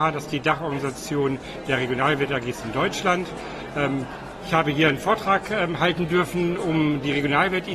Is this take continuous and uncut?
yes; 0 cuts

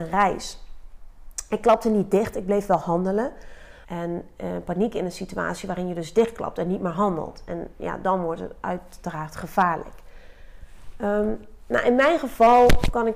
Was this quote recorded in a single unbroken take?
no; 1 cut; at 3.8 s

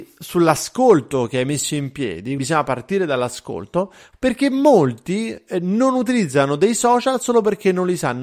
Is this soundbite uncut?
no; 2 cuts; at 2.4 s, 4.1 s

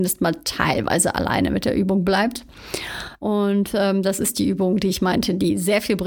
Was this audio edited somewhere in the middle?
yes; 1 cut; at 3.2 s

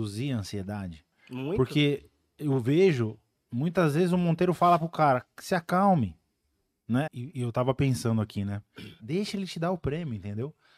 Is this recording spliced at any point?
yes; 2 cuts; at 7.1 s, 9.0 s

